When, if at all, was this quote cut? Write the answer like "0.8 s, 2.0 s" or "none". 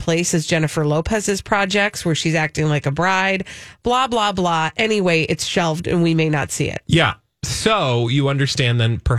none